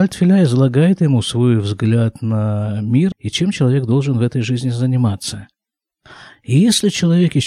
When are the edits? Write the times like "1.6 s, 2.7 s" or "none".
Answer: 3.1 s